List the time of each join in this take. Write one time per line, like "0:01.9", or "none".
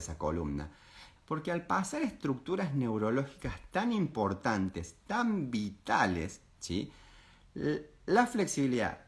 0:01.2